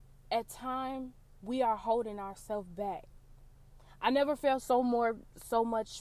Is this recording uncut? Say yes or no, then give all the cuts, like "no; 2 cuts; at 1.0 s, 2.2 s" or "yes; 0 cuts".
yes; 0 cuts